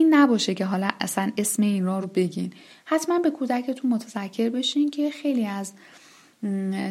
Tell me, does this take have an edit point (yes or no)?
yes